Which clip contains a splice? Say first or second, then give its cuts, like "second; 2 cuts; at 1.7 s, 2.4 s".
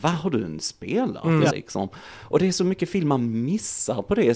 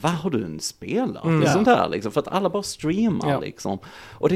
first; 1 cut; at 1.5 s